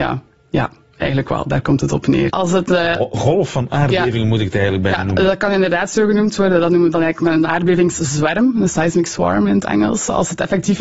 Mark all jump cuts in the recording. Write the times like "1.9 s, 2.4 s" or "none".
2.3 s